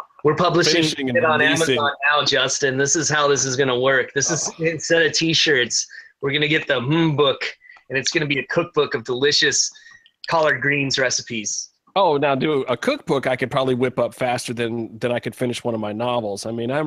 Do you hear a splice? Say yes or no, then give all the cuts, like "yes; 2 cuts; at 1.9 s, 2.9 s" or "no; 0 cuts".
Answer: no; 0 cuts